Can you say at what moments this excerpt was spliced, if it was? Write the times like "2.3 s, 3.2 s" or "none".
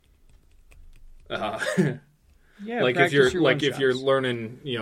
none